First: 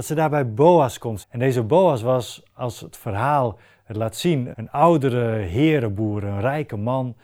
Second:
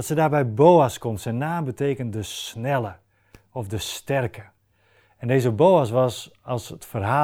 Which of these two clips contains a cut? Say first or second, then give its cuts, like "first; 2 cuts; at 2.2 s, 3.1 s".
first; 2 cuts; at 1.2 s, 4.5 s